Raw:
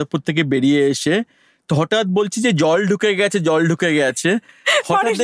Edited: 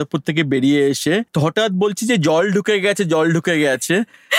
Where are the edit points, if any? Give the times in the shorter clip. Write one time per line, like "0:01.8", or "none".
0:01.3